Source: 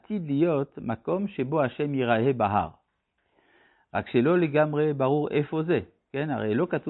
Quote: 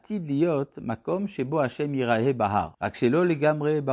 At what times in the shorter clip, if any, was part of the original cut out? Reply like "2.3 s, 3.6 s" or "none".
2.7 s

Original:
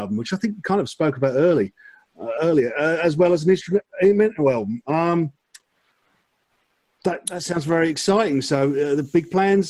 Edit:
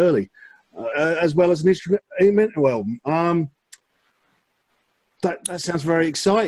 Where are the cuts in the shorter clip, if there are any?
0.9 s

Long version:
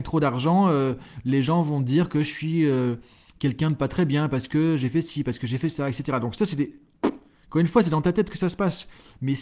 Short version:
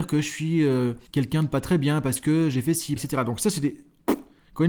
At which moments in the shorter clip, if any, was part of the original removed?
1.1 s, 3.0 s

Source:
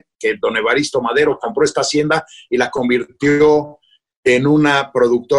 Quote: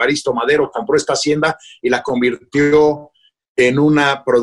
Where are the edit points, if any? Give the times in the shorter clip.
none

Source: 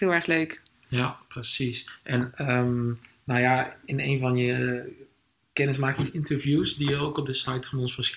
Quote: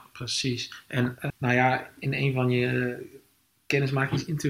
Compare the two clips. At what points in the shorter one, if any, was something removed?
1.3 s

